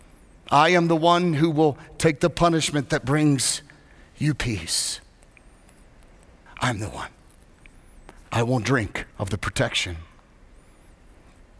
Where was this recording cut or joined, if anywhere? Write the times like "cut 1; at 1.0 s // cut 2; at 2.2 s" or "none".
cut 1; at 6.5 s // cut 2; at 9.1 s